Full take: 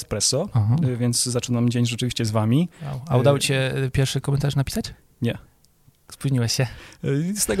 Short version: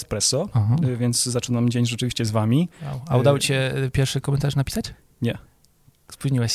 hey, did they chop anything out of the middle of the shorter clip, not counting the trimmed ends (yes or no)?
no